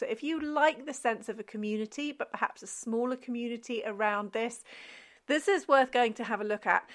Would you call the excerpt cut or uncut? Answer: uncut